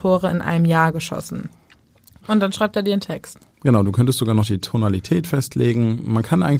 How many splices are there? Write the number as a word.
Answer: one